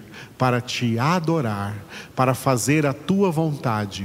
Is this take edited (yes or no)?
no